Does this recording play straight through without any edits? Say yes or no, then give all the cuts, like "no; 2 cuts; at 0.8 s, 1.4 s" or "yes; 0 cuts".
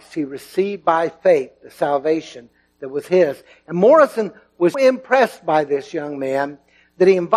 no; 1 cut; at 4.7 s